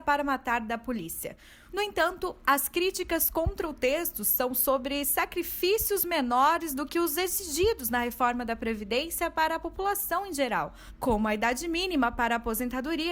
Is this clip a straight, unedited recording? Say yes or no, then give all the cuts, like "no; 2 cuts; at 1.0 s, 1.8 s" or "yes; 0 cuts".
no; 1 cut; at 1.7 s